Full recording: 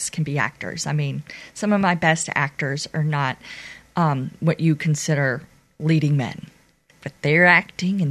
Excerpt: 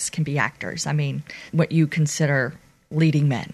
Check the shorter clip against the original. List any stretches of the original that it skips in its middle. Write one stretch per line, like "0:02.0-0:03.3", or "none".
0:01.5-0:04.4